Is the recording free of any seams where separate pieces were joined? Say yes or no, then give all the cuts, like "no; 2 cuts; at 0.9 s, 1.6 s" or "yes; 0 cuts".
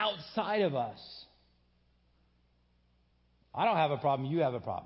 yes; 0 cuts